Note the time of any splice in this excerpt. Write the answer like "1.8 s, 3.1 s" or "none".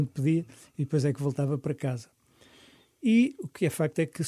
none

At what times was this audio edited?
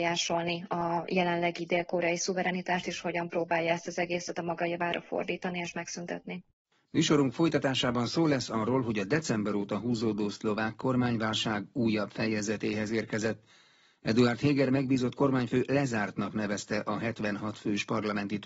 none

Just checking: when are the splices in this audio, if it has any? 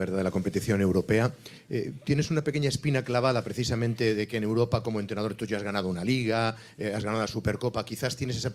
none

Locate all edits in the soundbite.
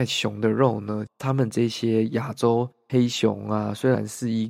1.1 s

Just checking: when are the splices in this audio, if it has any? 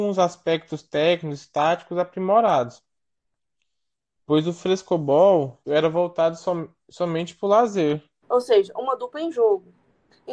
5.7 s, 8.2 s

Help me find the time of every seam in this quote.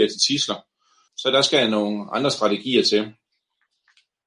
1.1 s

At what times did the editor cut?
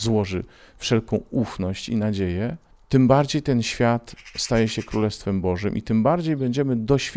none

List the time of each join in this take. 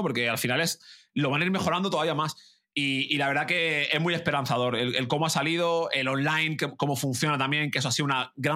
none

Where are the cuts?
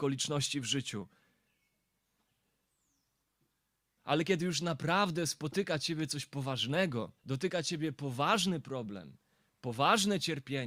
4.0 s, 7.2 s

